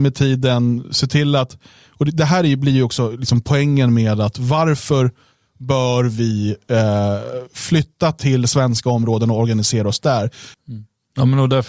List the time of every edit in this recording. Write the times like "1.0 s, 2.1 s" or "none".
10.5 s